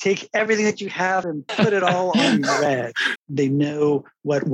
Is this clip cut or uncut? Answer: cut